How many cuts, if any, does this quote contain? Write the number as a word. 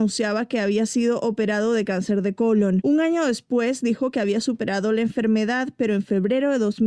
zero